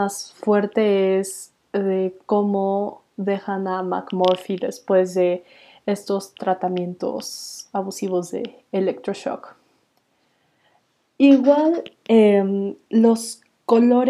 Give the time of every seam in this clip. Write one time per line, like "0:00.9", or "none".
none